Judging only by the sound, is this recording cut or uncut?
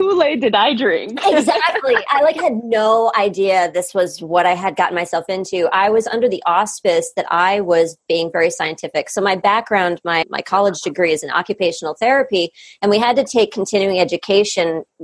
cut